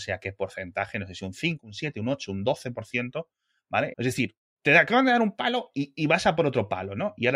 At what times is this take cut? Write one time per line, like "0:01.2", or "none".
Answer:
0:03.9